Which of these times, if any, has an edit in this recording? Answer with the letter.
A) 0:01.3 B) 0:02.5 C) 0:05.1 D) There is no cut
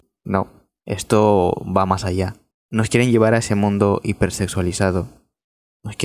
B